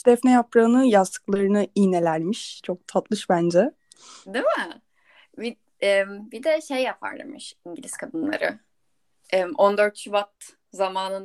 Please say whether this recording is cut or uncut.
uncut